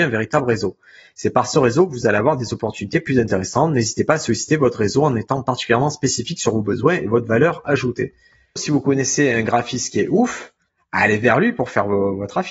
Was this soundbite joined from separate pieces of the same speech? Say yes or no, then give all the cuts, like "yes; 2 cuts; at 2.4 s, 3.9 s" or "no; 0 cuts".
yes; 1 cut; at 8.6 s